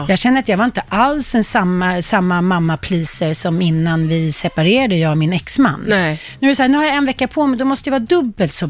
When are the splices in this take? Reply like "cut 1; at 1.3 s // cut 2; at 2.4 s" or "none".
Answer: none